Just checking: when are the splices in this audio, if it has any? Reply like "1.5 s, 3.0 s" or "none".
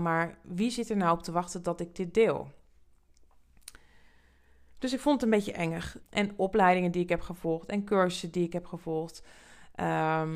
6.0 s